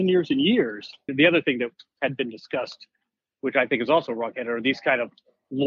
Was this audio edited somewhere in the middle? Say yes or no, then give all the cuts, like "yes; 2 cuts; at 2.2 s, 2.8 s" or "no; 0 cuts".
yes; 1 cut; at 1.1 s